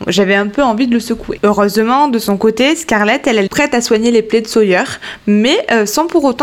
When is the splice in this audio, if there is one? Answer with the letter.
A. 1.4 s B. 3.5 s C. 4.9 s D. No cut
B